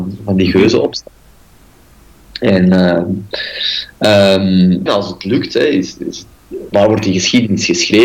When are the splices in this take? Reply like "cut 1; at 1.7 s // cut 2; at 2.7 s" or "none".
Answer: cut 1; at 4.9 s // cut 2; at 6.7 s